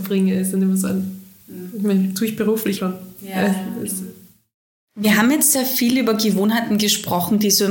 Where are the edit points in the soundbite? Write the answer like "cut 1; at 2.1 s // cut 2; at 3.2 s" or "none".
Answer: cut 1; at 2.8 s